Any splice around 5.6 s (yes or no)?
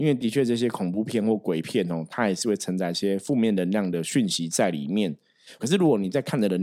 yes